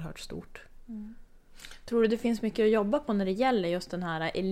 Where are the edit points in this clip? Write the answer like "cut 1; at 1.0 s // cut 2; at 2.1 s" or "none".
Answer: none